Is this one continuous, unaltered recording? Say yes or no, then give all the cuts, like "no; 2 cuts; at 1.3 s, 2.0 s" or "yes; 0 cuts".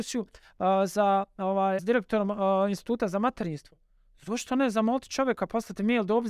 no; 1 cut; at 1.8 s